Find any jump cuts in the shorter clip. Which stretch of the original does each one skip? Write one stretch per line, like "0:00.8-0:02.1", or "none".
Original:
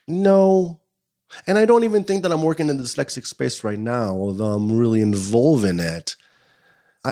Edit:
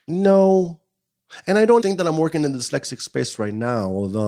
0:01.8-0:02.1